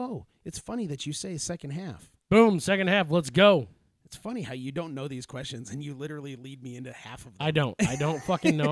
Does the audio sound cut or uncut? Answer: uncut